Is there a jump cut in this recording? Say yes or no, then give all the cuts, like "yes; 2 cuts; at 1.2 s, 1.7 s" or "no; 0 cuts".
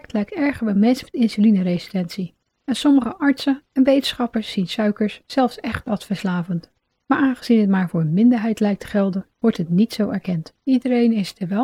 yes; 1 cut; at 10.6 s